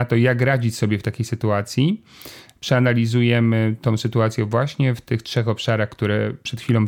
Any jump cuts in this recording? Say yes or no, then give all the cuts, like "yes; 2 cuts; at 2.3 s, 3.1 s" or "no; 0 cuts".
no; 0 cuts